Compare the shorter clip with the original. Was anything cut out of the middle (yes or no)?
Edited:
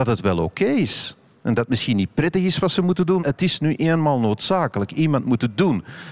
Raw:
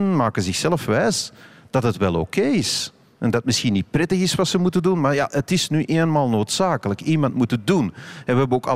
yes